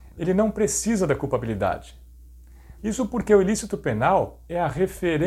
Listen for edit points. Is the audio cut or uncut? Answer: cut